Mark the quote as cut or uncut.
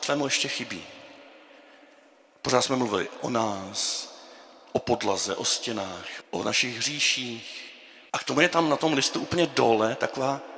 cut